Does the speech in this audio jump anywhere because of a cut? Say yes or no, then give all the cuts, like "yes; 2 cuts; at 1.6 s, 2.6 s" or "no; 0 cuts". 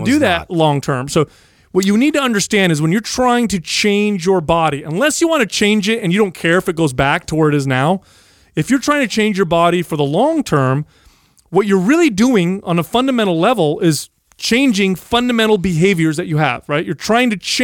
no; 0 cuts